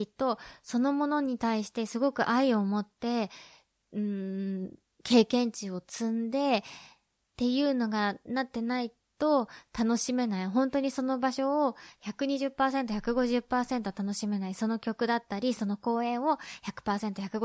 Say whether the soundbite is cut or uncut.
uncut